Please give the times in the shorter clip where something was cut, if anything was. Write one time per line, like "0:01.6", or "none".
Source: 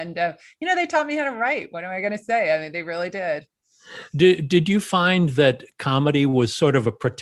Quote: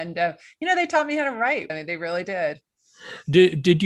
0:01.7